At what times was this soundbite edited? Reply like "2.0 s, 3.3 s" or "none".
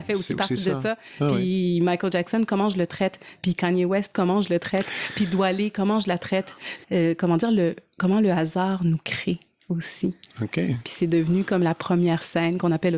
6.8 s